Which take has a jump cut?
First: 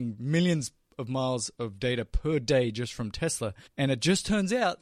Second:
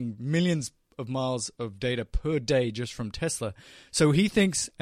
first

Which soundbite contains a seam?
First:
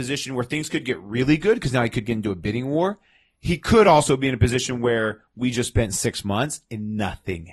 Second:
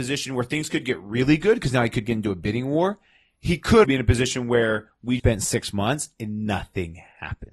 second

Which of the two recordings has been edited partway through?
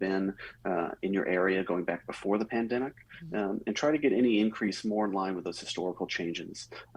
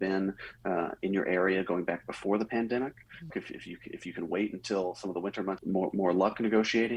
second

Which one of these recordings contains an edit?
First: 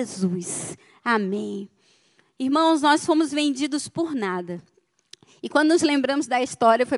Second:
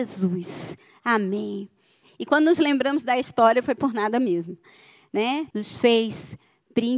second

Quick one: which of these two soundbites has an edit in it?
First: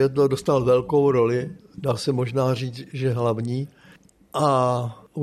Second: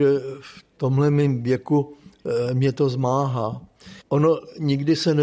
second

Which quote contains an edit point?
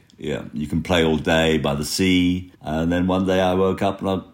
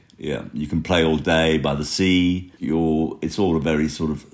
first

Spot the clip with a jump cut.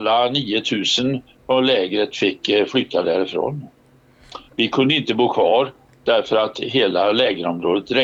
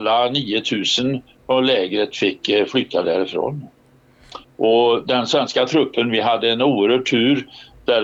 second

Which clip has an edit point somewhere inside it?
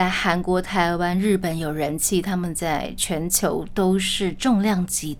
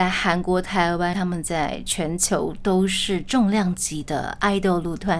second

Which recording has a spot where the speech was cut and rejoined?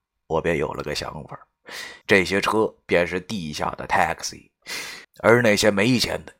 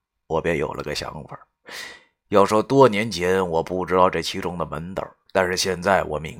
first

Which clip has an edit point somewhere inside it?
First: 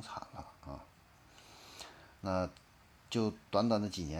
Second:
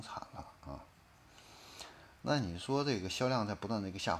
first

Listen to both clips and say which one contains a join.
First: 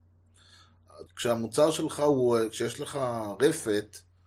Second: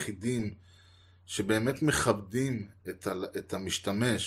first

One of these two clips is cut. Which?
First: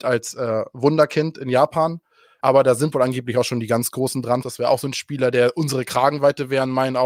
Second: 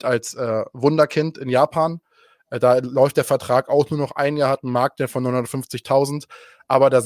first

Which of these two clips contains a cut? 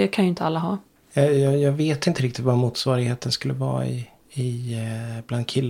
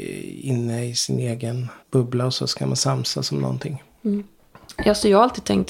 second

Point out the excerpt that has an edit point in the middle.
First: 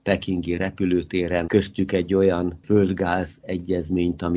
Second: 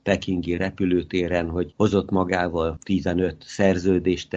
first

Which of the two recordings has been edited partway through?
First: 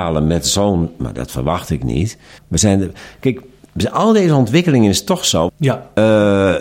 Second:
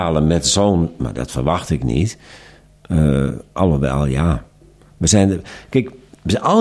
first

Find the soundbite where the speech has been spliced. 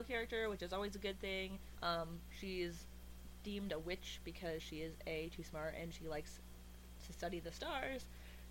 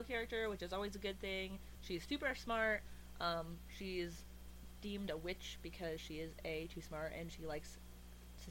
first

